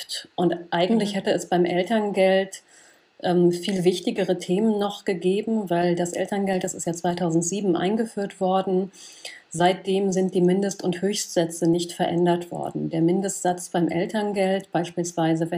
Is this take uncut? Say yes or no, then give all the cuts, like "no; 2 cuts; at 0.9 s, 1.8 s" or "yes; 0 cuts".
yes; 0 cuts